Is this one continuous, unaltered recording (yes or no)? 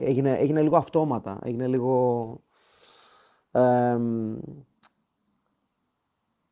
yes